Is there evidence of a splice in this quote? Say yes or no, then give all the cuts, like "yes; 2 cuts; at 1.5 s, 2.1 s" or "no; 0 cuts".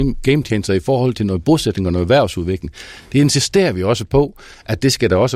no; 0 cuts